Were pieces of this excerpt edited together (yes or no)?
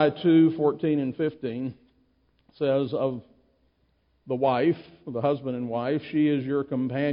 no